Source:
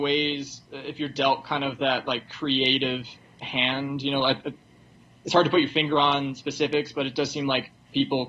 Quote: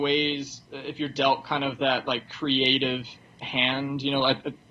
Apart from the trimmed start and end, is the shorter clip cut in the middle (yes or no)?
no